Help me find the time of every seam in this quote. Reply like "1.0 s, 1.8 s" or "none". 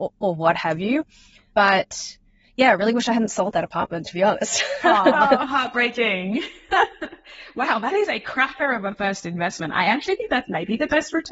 none